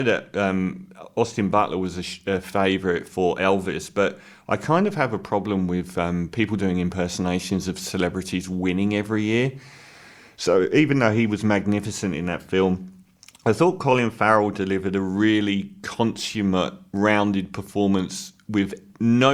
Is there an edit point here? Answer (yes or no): no